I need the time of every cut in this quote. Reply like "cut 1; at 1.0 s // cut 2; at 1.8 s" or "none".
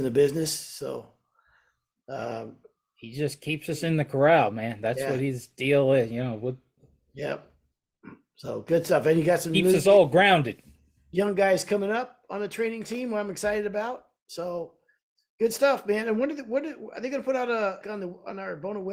cut 1; at 17.8 s